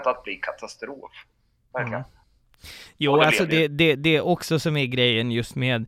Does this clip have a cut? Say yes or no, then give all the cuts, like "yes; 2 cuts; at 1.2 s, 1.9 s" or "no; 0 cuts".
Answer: no; 0 cuts